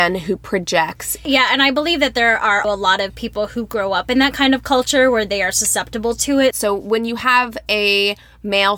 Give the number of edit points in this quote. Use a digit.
2